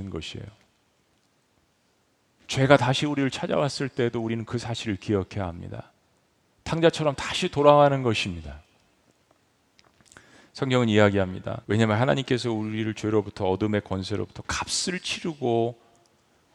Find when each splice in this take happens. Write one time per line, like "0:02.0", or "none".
0:11.6